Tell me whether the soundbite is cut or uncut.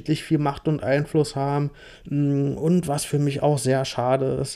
cut